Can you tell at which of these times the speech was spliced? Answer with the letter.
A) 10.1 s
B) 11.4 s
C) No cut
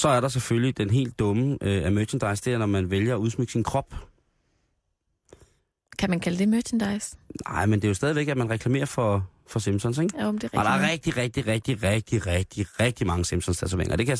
B